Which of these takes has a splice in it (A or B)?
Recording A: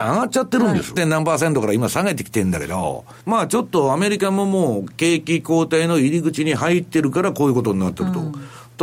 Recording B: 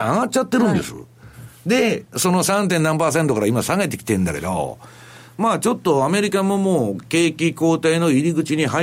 A